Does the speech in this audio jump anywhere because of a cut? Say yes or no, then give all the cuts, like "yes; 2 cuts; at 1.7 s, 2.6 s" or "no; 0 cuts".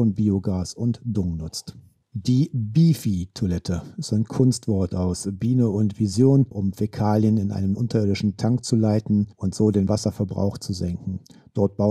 yes; 1 cut; at 6.5 s